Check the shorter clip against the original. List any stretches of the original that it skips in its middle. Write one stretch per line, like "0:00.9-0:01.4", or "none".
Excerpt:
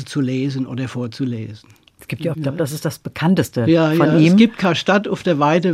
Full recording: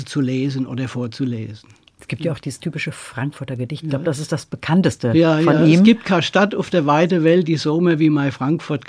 0:02.3-0:03.8

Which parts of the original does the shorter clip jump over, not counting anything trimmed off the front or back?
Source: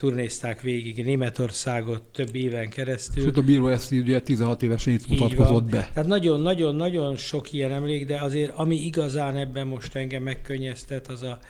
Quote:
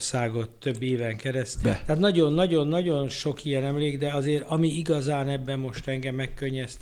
0:03.2-0:05.7

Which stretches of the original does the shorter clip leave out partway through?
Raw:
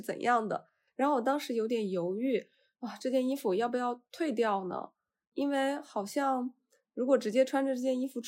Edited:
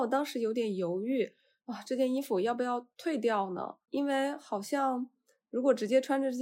0:05.0-0:05.3

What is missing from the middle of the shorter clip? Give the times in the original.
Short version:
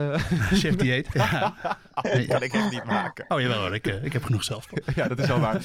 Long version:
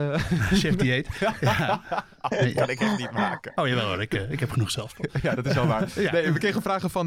0:01.1-0:01.4

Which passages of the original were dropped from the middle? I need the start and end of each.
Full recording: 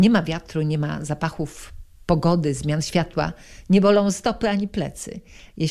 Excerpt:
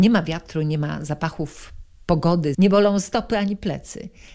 0:02.5-0:03.7

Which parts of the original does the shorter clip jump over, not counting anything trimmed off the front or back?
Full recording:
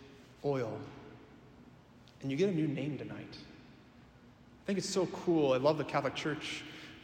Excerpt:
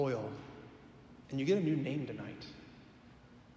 0:01.7-0:02.2

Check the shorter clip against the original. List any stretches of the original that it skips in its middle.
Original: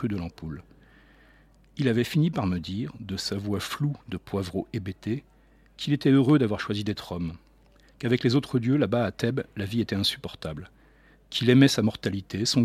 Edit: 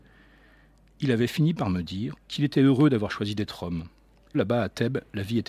0:02.9-0:05.6
0:07.8-0:08.8

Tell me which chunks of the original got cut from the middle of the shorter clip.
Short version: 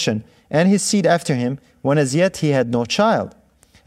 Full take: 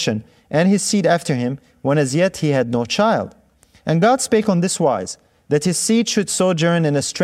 none

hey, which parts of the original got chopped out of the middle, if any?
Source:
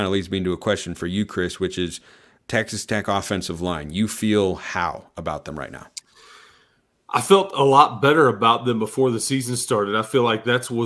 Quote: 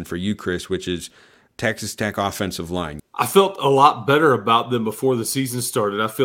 0:03.9-0:06.9

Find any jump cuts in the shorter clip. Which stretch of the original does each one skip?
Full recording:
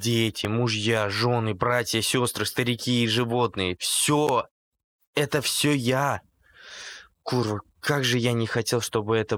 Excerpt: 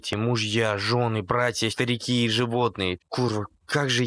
0:02.0-0:02.5
0:03.8-0:07.1

